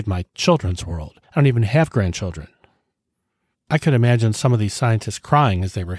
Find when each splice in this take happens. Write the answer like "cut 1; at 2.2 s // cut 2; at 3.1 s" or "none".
cut 1; at 3.5 s